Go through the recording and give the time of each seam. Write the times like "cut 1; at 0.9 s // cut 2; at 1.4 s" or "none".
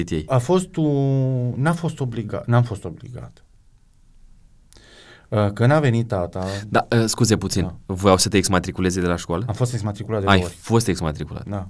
none